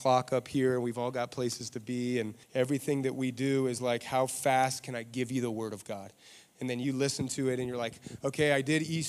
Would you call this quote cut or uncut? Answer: cut